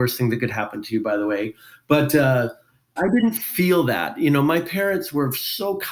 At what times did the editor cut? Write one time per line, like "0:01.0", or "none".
0:03.0